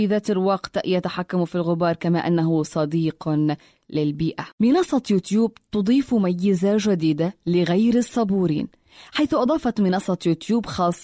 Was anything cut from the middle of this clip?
yes; 1 cut; at 4.5 s

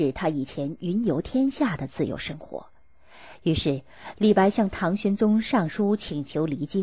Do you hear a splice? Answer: no; 0 cuts

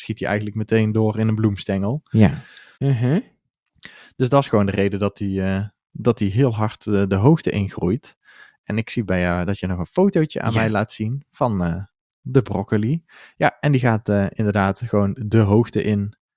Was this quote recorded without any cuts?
no; 1 cut; at 2.7 s

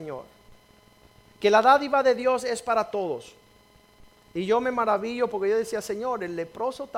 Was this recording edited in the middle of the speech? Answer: yes; 1 cut; at 1.3 s

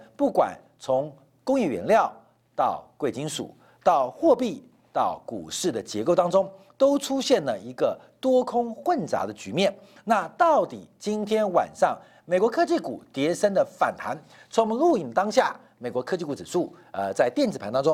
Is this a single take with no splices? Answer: yes; 0 cuts

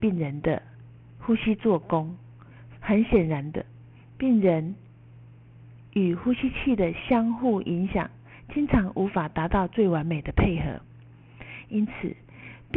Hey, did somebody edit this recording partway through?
yes; 1 cut; at 2.8 s

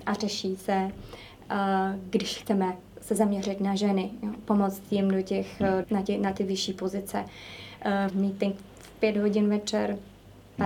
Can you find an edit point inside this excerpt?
yes; 2 cuts; at 5.8 s, 8.1 s

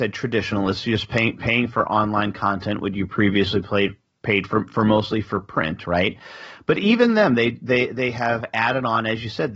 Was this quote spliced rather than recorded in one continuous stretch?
no; 0 cuts

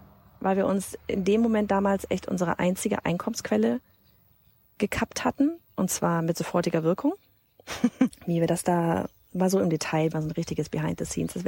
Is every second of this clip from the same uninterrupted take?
no; 2 cuts; at 8.1 s, 10.1 s

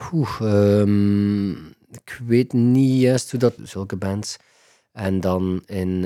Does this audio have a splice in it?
yes; 1 cut; at 3.6 s

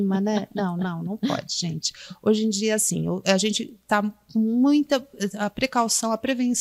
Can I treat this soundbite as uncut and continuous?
yes; 0 cuts

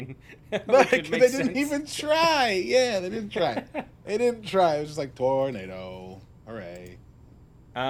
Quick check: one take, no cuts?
yes; 0 cuts

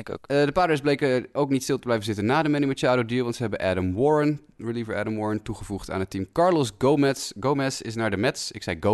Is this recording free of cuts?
yes; 0 cuts

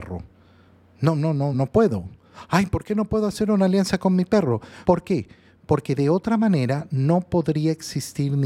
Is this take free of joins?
no; 2 cuts; at 1.5 s, 4.8 s

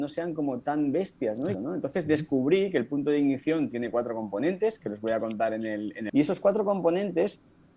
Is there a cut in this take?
yes; 2 cuts; at 1.5 s, 6.1 s

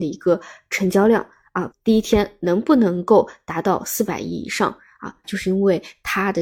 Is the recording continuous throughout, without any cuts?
no; 2 cuts; at 1.7 s, 5.2 s

